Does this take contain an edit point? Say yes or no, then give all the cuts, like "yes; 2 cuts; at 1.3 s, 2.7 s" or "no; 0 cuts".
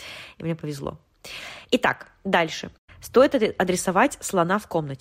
no; 0 cuts